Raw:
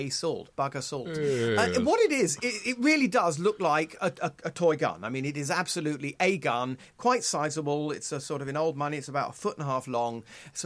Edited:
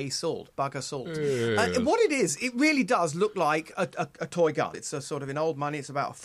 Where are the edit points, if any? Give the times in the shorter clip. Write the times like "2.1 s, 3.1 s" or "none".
2.4 s, 4.7 s

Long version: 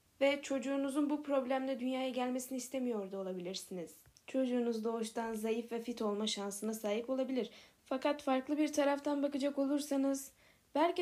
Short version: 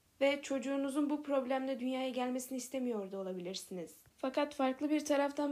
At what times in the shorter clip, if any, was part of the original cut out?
4.1 s

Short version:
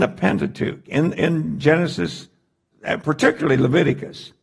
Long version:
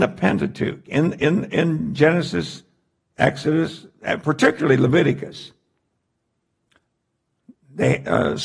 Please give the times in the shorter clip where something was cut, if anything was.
1.2 s, 2.7 s

